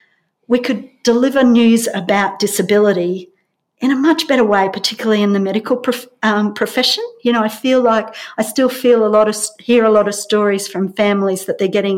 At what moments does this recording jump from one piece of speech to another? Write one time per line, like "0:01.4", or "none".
none

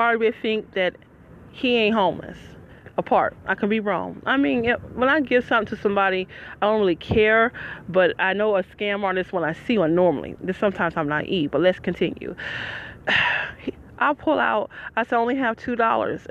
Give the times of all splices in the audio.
none

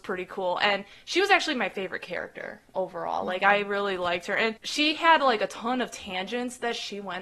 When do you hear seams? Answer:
none

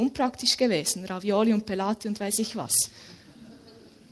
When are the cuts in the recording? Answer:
none

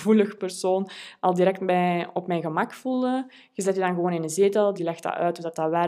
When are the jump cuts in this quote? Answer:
0:04.7

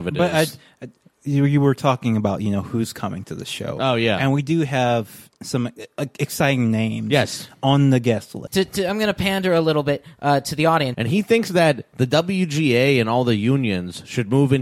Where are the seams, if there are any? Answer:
0:01.0
0:08.5
0:10.9

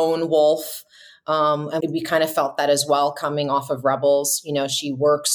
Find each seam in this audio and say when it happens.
0:01.8

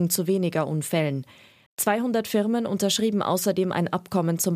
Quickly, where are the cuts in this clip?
0:01.7

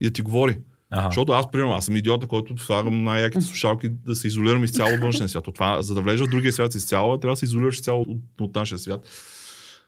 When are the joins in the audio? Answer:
0:05.8
0:08.0

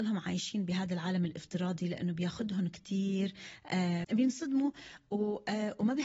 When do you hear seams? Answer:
0:04.0

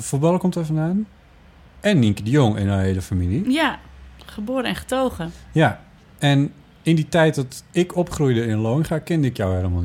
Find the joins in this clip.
none

